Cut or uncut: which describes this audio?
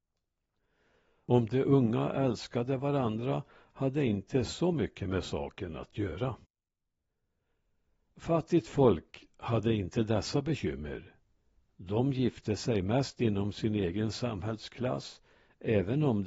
uncut